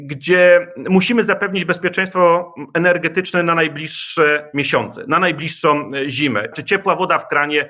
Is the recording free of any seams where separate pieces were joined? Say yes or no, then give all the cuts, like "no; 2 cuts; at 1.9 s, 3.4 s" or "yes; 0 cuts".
no; 1 cut; at 6.5 s